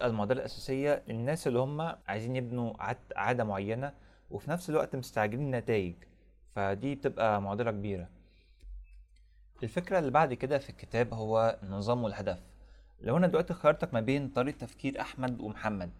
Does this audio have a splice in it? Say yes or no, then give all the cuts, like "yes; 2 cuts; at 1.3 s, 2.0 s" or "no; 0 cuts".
yes; 1 cut; at 2.0 s